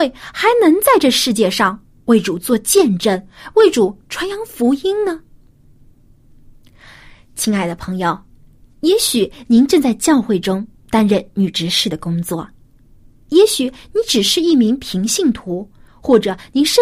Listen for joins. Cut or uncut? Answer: uncut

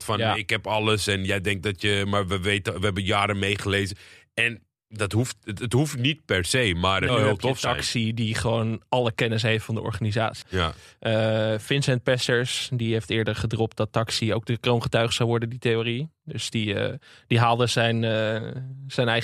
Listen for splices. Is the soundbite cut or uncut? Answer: cut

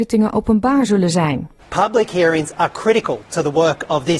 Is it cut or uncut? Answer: cut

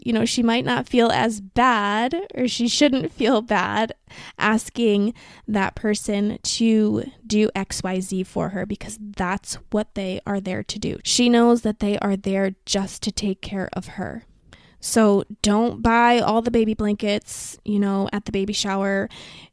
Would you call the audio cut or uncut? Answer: cut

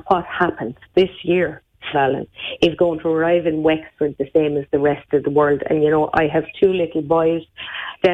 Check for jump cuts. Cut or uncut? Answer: cut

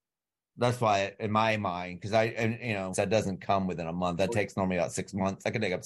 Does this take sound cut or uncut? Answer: cut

